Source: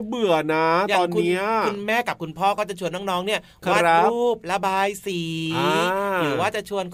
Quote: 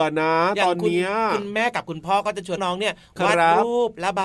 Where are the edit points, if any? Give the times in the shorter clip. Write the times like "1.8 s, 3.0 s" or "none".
2.6 s